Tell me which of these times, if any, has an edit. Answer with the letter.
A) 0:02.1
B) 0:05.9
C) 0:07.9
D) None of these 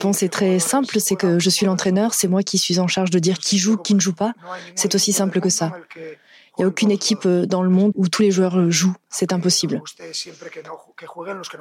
C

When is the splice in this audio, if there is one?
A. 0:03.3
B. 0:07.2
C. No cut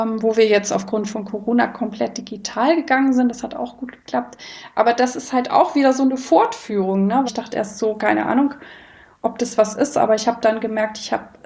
B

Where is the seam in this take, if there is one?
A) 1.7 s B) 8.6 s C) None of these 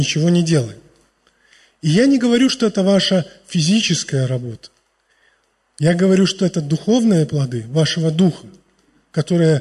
C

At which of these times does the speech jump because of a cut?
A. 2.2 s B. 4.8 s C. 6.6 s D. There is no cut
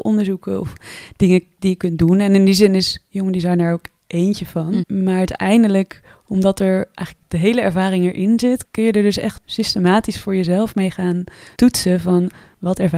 B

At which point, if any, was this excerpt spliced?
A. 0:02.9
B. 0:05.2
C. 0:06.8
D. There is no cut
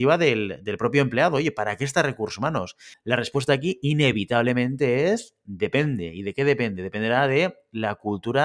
A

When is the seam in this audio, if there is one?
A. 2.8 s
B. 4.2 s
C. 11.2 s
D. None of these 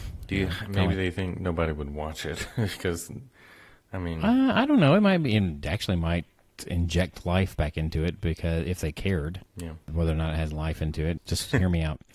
C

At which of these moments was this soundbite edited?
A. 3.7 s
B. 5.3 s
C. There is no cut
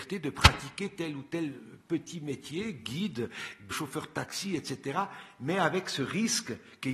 A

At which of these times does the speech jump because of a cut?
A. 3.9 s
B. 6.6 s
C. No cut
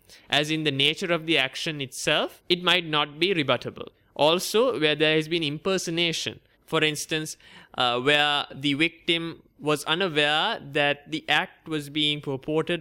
C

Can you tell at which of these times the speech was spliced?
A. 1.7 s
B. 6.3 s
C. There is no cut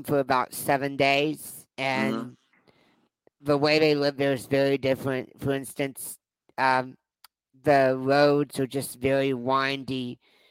A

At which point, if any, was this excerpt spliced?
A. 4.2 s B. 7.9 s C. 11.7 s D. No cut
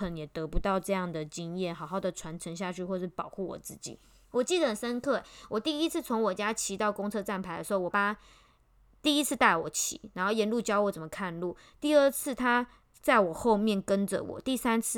B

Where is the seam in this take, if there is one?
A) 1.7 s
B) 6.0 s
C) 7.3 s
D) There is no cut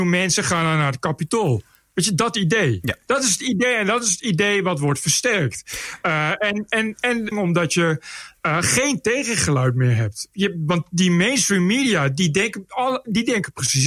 C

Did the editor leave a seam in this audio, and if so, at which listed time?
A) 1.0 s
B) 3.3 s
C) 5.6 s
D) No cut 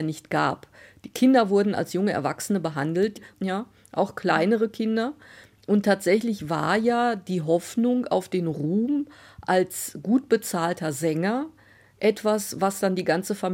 B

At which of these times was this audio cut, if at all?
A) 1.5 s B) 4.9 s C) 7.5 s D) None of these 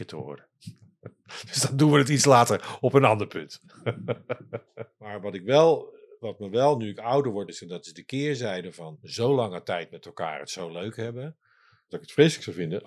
C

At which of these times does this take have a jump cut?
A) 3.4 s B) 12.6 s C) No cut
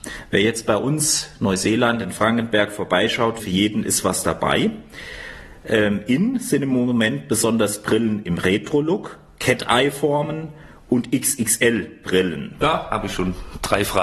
A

